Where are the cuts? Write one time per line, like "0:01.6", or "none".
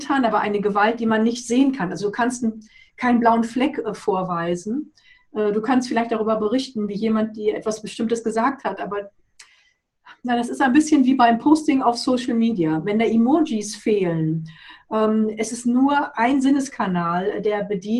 none